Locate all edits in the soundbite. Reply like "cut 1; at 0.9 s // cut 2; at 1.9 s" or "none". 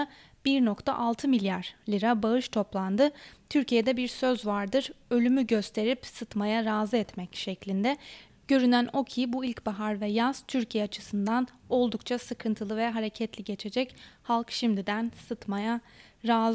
none